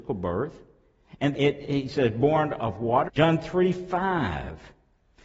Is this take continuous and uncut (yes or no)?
no